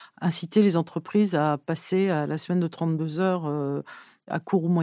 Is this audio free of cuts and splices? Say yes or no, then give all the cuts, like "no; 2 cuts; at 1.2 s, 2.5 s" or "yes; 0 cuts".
yes; 0 cuts